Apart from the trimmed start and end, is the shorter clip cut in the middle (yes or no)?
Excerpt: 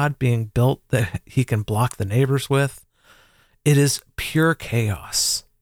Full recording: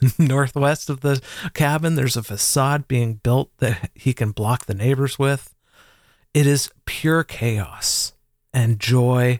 no